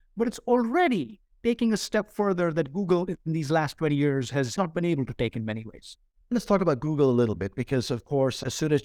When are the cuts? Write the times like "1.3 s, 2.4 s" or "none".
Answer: none